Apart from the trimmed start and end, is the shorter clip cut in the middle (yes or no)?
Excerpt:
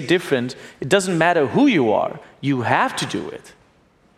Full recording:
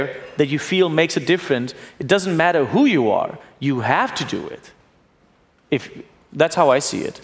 no